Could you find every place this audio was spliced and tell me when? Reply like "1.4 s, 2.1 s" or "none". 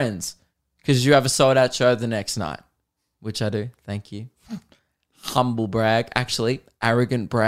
none